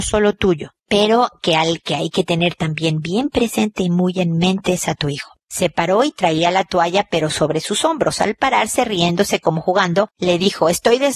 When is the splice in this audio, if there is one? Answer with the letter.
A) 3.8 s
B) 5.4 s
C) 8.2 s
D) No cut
B